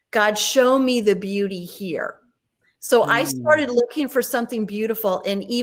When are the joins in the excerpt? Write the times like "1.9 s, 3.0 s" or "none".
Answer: none

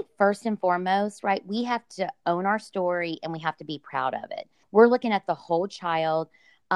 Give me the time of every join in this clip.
4.6 s

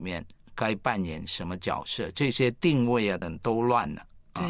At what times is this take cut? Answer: 3.2 s

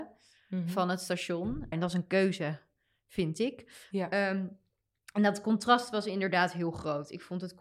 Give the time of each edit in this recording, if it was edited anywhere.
1.7 s

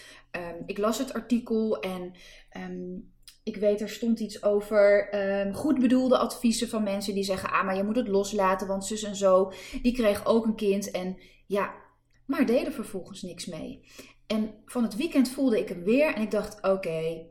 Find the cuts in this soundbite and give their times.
12.1 s

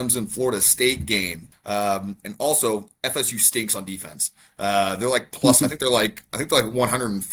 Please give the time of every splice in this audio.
1.5 s

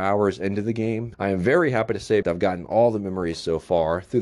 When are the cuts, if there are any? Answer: 1.1 s, 2.2 s

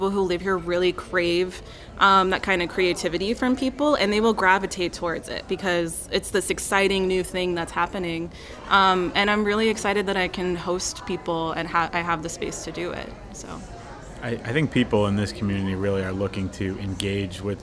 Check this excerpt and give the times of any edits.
none

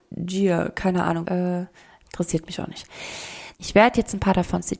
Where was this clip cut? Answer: 1.2 s, 3.5 s

